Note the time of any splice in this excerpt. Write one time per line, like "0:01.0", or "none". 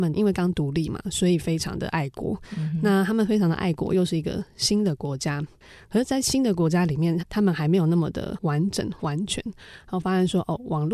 0:07.2